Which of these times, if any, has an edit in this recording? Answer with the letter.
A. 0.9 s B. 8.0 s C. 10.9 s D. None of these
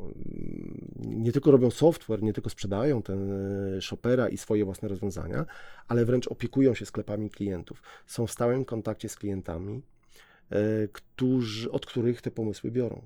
D